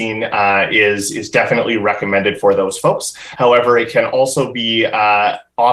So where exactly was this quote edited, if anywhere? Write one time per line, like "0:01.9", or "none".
none